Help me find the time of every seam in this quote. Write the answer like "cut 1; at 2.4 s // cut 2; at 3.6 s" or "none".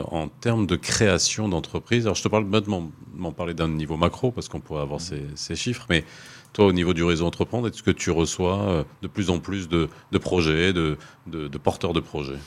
none